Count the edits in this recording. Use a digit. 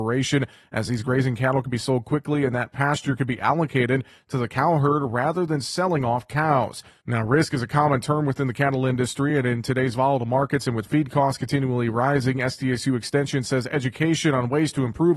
0